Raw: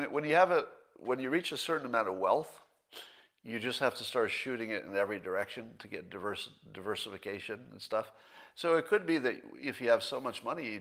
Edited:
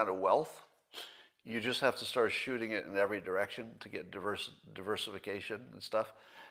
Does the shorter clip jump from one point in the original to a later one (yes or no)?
no